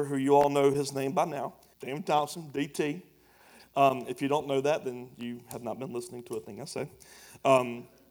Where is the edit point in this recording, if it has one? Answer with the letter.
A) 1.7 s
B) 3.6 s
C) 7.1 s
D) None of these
A